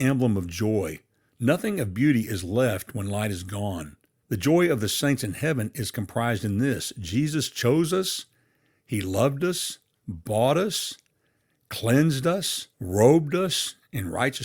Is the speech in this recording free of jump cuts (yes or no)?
no